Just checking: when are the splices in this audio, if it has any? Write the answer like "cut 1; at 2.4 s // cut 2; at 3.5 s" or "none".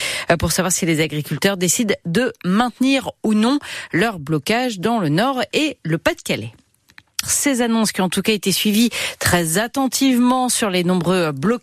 cut 1; at 7.2 s